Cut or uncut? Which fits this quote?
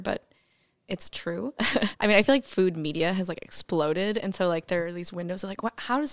cut